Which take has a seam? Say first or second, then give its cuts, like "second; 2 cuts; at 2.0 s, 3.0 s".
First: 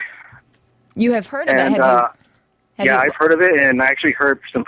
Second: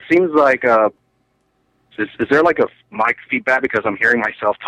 second; 1 cut; at 1.9 s